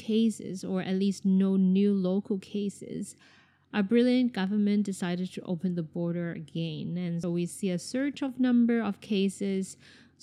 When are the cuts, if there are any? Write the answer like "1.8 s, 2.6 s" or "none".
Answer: 7.2 s